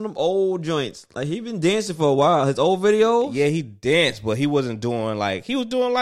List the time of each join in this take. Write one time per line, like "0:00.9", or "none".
none